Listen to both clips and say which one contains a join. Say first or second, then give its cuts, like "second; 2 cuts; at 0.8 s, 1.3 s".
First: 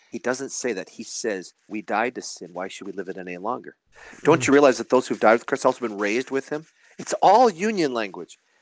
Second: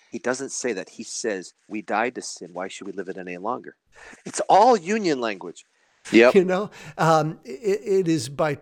second; 2 cuts; at 4.2 s, 6.0 s